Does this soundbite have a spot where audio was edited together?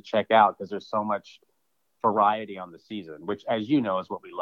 no; 0 cuts

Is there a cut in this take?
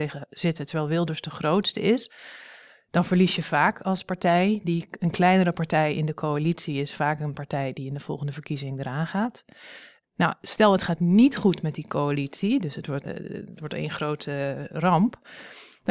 yes; 2 cuts; at 10.0 s, 13.0 s

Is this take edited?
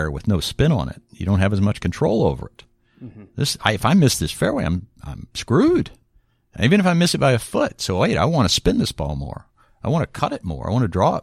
no; 0 cuts

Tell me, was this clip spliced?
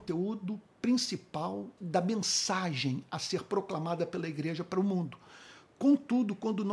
yes; 1 cut; at 1.8 s

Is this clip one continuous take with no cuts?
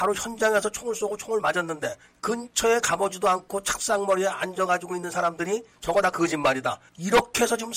yes; 0 cuts

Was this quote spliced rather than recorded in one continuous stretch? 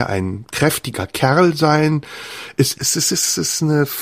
yes; 1 cut; at 2.8 s

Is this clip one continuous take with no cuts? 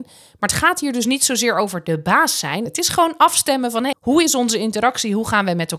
no; 2 cuts; at 2.7 s, 3.9 s

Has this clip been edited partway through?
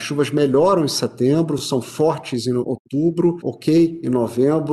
no; 0 cuts

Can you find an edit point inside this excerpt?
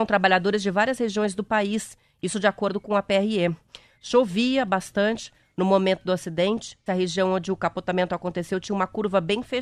yes; 2 cuts; at 3.9 s, 6.9 s

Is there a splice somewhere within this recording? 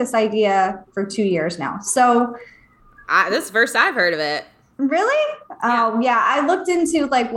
no; 0 cuts

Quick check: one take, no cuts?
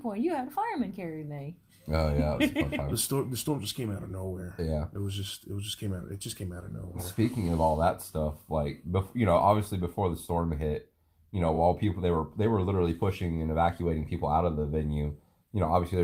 yes; 0 cuts

